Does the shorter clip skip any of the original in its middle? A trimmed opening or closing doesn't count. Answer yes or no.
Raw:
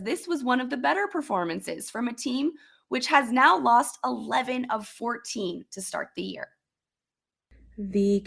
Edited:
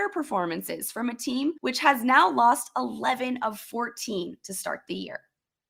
yes